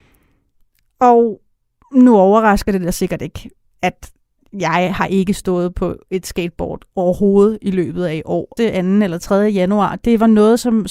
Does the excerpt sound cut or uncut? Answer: cut